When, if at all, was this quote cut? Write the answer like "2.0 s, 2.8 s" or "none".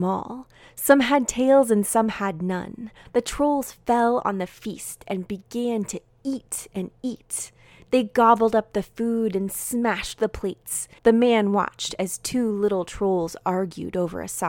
3.0 s, 11.0 s